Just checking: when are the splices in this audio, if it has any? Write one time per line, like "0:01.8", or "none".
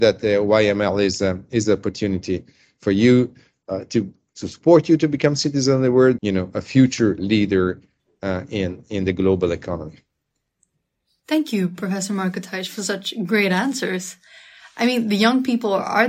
0:06.2